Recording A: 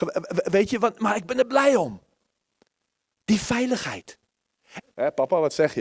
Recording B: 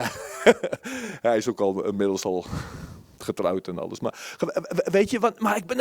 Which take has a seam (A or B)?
A